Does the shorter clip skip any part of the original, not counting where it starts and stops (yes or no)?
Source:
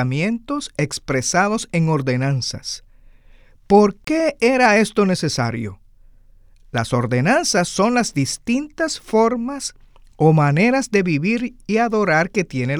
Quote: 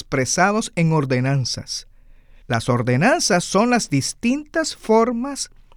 yes